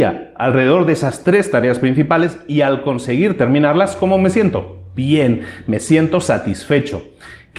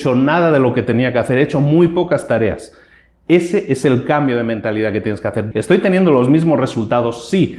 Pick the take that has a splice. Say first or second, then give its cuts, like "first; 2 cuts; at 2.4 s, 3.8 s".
second; 1 cut; at 5.5 s